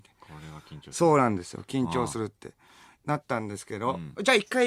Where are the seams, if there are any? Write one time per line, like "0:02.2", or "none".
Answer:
none